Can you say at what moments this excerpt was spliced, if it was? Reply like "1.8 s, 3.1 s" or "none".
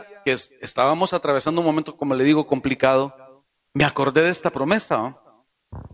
none